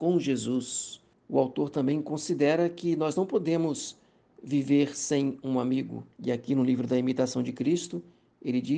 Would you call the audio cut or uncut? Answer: cut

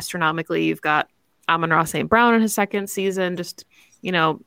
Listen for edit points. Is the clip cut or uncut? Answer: uncut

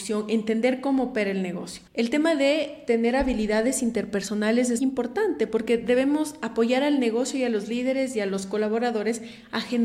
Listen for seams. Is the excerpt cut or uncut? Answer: cut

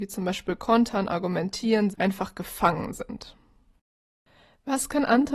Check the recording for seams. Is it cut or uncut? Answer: cut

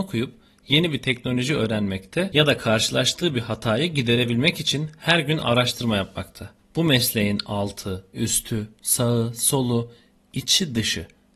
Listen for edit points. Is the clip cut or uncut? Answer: uncut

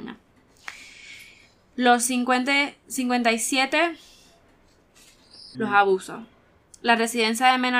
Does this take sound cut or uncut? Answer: cut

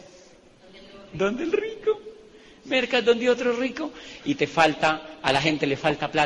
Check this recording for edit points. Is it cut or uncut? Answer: uncut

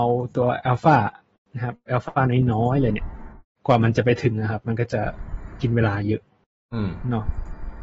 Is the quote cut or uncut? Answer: uncut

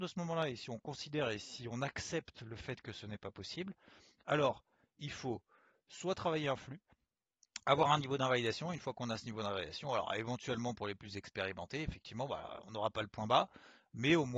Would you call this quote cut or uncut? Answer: uncut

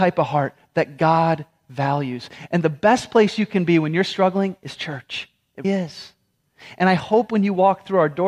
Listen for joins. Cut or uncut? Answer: cut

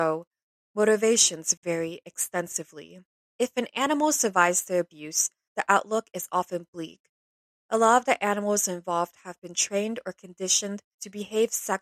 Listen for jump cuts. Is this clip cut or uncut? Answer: cut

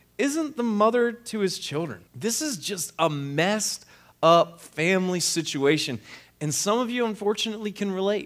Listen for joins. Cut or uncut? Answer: cut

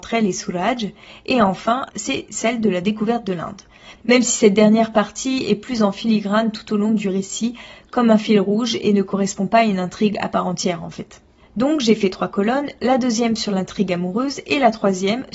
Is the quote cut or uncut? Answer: cut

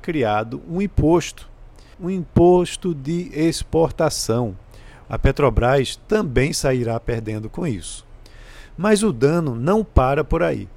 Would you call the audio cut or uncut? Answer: cut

